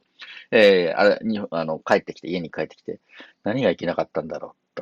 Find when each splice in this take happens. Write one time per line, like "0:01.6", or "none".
none